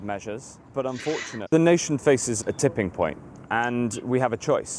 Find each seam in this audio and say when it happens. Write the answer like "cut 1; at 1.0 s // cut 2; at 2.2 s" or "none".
cut 1; at 1.5 s